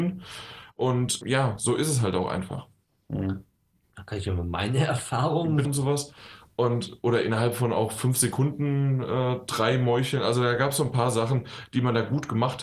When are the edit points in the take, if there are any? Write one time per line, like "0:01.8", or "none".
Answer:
0:01.2
0:05.7